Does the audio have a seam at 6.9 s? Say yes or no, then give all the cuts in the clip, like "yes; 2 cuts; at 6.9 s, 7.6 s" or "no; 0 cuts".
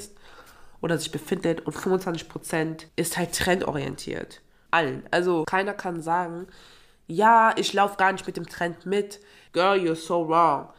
no; 3 cuts; at 2.9 s, 4.7 s, 9.5 s